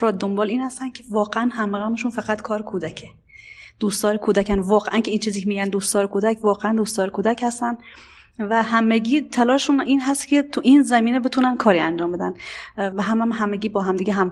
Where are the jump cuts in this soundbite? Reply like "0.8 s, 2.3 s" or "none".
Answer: 12.9 s